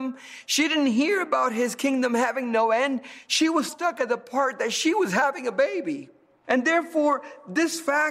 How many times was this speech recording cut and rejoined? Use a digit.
2